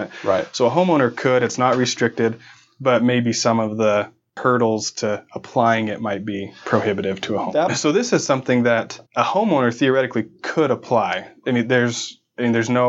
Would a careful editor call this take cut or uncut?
cut